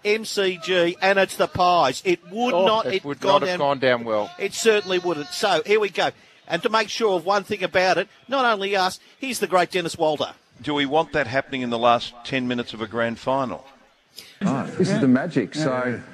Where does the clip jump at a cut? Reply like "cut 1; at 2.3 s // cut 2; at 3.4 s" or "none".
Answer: cut 1; at 6.6 s // cut 2; at 14.4 s